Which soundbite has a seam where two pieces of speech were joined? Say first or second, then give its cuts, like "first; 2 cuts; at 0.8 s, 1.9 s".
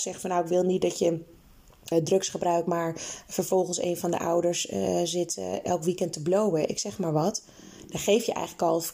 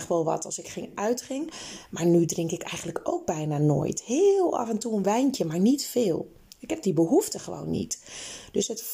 first; 1 cut; at 1.9 s